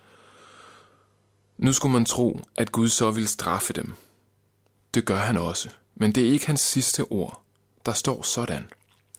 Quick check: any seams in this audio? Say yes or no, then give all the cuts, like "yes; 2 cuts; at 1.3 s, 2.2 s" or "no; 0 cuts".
no; 0 cuts